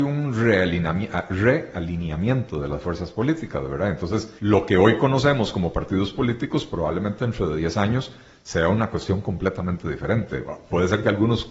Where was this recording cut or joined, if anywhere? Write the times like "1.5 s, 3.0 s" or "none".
4.4 s